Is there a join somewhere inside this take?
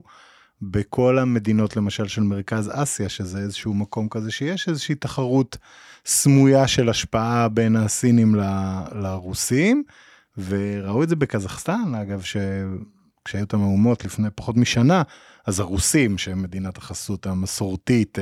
no; 0 cuts

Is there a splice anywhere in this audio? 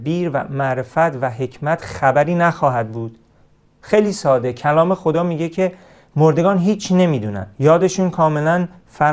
yes; 1 cut; at 7.5 s

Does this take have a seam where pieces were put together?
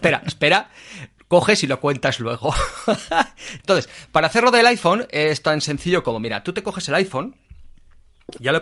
yes; 1 cut; at 3.6 s

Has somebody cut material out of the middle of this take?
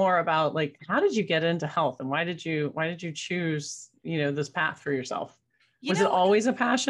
no; 0 cuts

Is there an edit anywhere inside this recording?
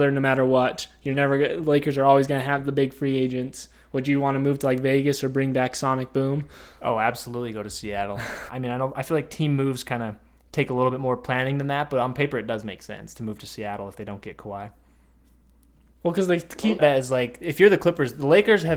yes; 2 cuts; at 8.5 s, 16.8 s

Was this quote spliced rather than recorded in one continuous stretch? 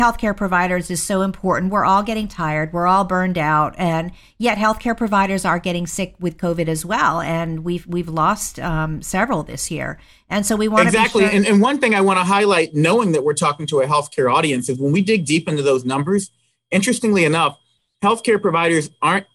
no; 0 cuts

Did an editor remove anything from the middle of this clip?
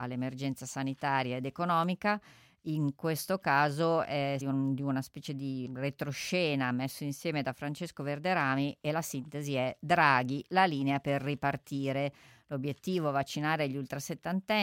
yes; 2 cuts; at 4.4 s, 5.7 s

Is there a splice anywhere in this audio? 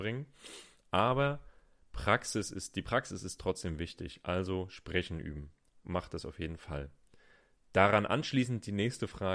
no; 0 cuts

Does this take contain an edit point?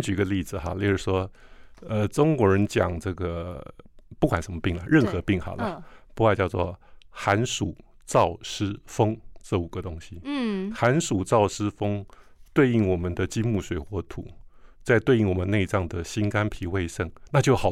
yes; 1 cut; at 12.5 s

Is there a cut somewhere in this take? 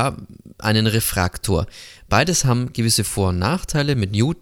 no; 0 cuts

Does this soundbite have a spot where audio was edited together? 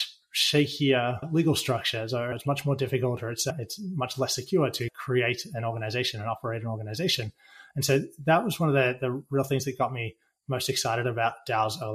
no; 0 cuts

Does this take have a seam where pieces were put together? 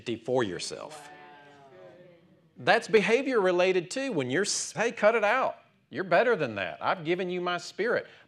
yes; 1 cut; at 4.7 s

